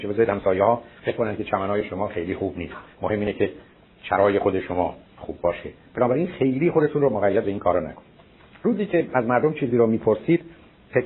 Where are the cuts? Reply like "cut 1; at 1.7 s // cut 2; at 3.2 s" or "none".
cut 1; at 5.0 s